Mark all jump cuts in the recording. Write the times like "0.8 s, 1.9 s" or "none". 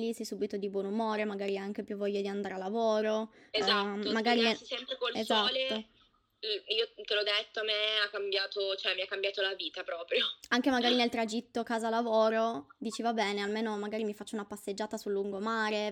none

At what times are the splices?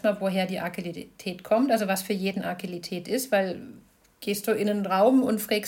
none

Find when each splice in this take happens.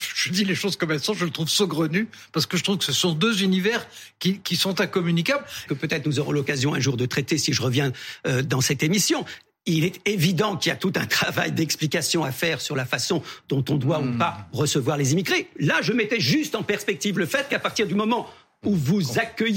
5.7 s

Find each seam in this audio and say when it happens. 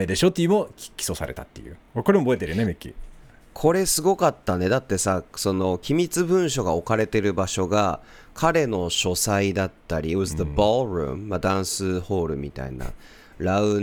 none

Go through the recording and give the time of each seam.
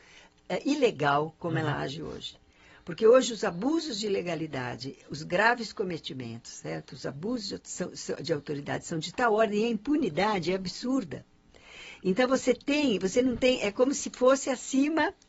none

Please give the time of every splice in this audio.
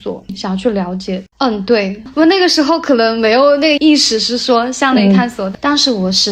1.3 s, 3.8 s

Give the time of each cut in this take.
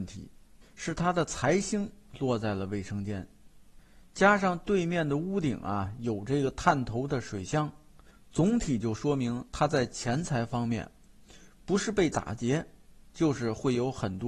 none

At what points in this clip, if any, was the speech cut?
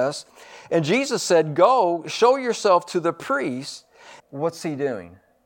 4.2 s

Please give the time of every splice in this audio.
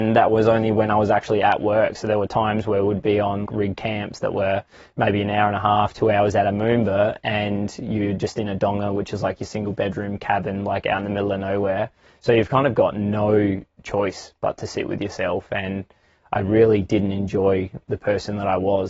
3.5 s

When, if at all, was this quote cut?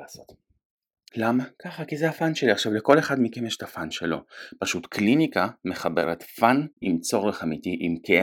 1.1 s, 6.7 s

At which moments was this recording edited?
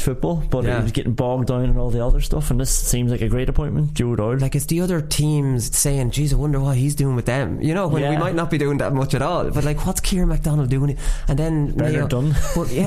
4.4 s

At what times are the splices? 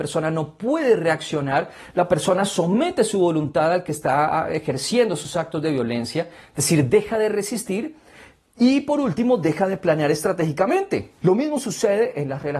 11.2 s

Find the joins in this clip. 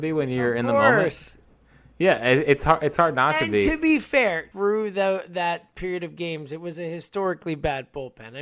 4.5 s

